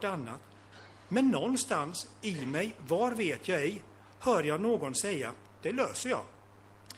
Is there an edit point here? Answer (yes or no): no